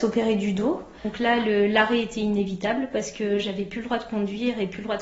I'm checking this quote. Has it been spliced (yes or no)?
no